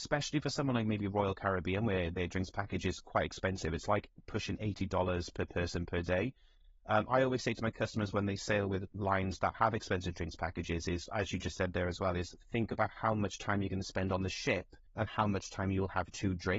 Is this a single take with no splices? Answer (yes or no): no